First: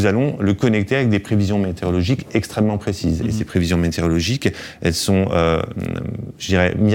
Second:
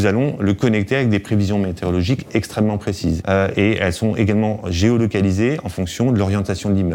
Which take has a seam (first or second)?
second